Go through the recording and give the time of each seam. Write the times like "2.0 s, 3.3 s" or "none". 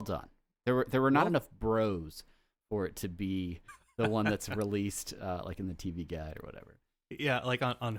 none